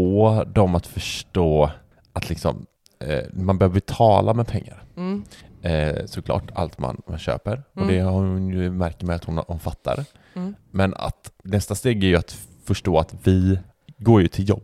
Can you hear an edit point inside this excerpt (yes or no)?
no